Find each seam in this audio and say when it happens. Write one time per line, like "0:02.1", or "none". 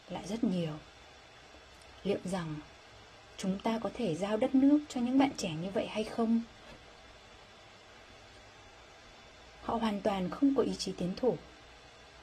0:09.6